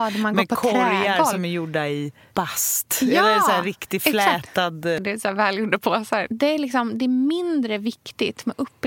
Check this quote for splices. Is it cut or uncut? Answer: cut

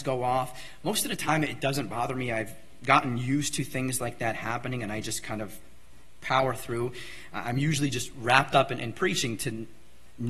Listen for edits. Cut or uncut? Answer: uncut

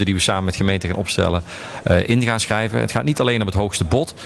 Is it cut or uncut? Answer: uncut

